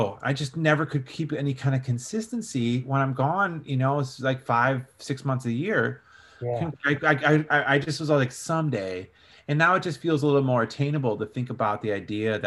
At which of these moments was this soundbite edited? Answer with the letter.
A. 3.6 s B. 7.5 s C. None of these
B